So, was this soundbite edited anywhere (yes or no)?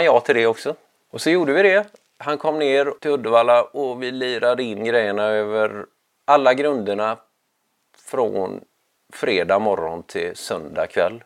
no